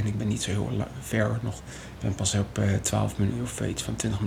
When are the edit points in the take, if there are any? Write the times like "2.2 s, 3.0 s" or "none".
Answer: none